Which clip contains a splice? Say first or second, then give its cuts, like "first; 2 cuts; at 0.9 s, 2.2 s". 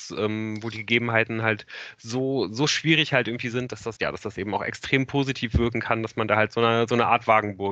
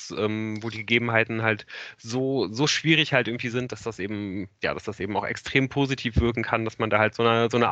first; 1 cut; at 4.0 s